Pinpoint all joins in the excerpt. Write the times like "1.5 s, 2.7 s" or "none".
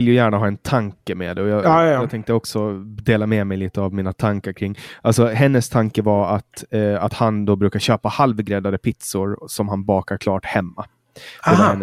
none